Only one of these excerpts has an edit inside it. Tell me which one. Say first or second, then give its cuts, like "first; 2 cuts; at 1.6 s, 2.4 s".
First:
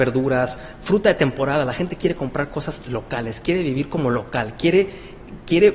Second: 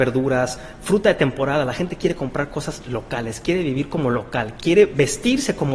second; 1 cut; at 4.6 s